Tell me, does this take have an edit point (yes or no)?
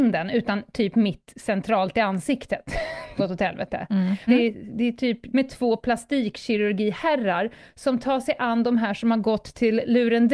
yes